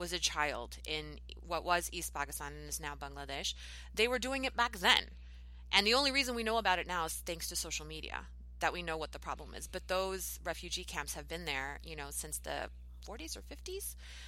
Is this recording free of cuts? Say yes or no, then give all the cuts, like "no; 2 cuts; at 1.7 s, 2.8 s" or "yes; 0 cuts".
yes; 0 cuts